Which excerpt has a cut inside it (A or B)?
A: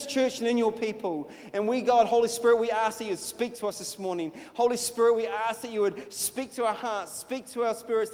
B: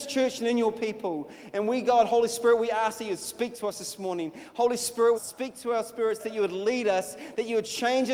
B